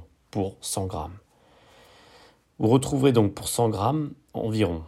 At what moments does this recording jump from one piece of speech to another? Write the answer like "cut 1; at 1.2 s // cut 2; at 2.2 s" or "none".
none